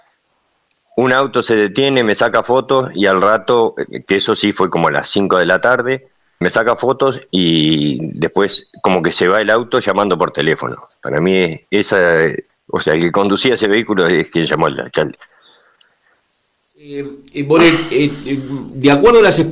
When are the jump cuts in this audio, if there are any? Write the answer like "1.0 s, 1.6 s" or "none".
6.4 s, 12.5 s